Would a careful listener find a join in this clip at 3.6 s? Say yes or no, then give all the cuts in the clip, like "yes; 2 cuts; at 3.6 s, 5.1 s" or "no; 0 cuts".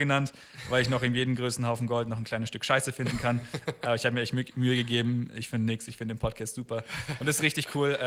no; 0 cuts